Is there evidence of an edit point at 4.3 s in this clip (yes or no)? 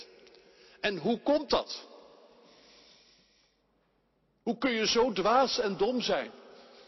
no